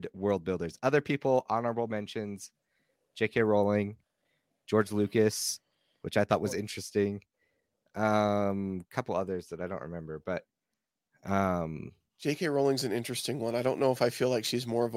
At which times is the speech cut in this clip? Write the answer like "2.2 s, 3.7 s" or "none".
none

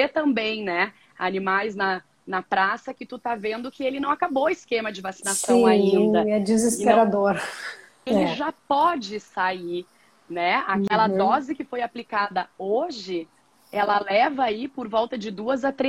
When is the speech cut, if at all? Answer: 8.1 s

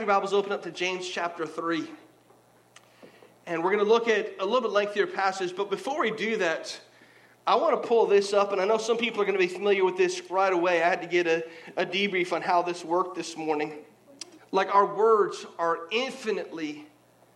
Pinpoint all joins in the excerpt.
14.4 s

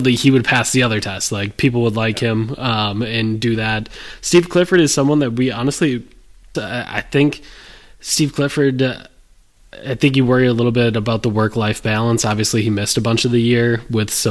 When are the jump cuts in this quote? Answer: 6.5 s

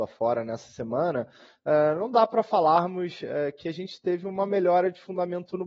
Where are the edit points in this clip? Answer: none

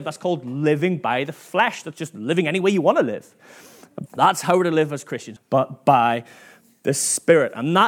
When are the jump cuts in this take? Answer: 4.1 s, 5.4 s

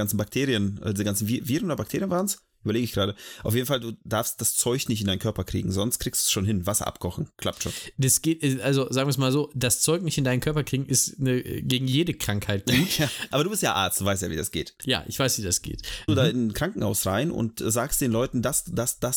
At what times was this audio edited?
13.3 s, 16.1 s

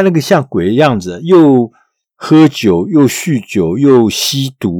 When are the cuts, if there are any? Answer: none

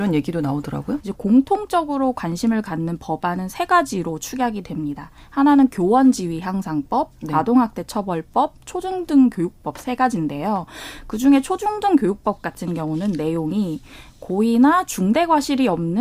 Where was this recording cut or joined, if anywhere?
1.0 s

